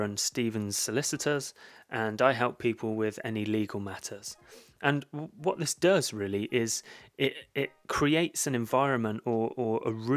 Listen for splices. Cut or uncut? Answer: uncut